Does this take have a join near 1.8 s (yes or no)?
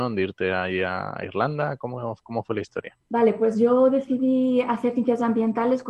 no